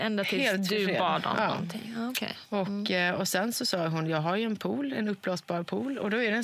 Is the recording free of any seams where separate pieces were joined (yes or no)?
yes